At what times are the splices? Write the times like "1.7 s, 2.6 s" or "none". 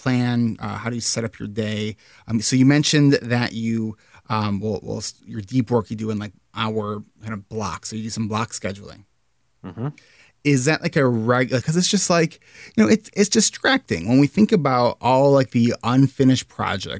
11.6 s